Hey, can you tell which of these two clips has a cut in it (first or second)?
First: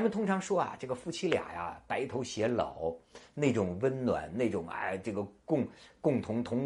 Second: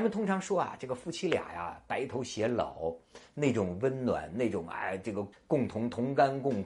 second